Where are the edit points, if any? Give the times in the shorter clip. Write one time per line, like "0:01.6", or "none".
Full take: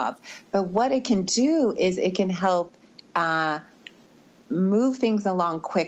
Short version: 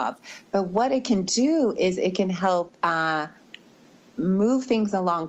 0:02.8